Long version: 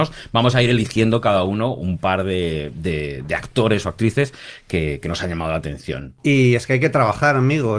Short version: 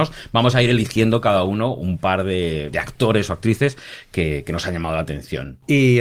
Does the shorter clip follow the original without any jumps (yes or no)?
no